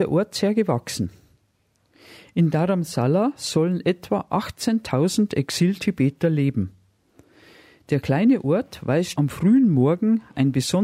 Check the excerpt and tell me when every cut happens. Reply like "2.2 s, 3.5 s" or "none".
9.2 s